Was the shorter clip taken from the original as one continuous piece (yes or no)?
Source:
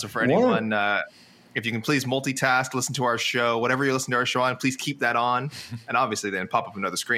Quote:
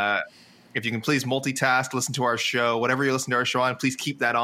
yes